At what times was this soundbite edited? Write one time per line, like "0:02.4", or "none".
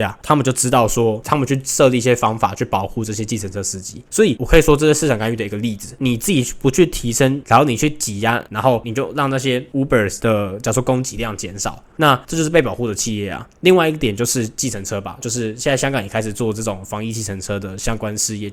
0:08.5
0:11.9